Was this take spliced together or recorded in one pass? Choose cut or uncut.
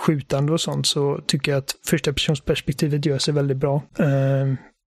cut